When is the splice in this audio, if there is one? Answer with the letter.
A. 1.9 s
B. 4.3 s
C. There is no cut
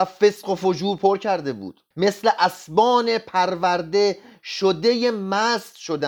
A